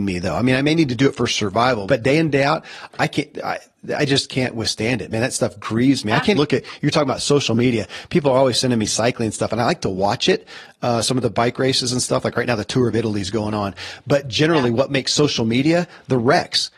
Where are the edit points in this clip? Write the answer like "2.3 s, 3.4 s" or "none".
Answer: 1.9 s, 6.3 s